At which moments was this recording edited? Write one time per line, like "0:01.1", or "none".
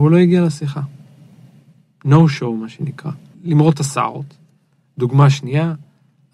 0:03.3

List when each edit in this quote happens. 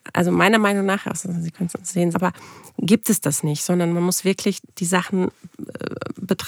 0:02.1

